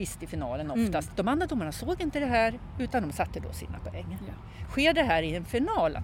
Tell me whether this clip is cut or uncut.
cut